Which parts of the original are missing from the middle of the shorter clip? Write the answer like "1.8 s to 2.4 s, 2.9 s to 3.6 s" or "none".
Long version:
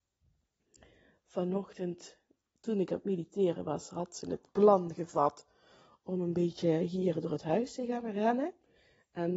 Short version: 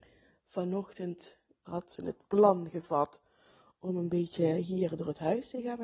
2.4 s to 3.9 s